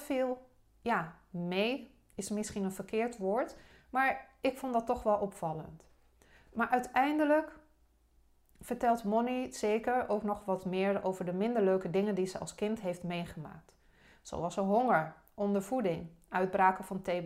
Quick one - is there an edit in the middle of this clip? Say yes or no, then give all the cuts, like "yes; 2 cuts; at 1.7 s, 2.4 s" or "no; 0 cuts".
no; 0 cuts